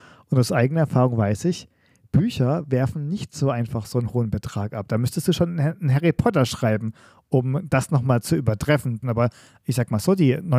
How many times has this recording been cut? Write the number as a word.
one